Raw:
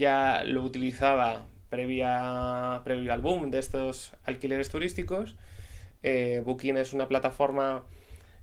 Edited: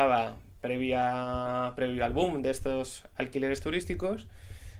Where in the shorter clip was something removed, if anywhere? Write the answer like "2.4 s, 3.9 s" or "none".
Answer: none